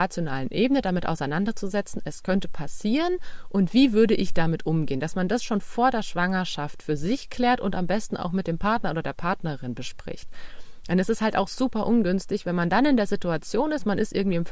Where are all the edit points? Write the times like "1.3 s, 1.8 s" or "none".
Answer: none